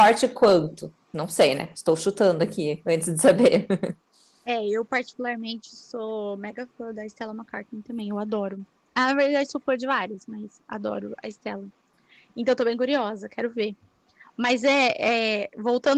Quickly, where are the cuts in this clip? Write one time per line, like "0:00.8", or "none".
none